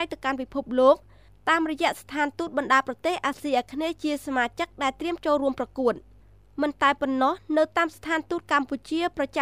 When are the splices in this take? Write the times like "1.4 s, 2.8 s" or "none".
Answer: none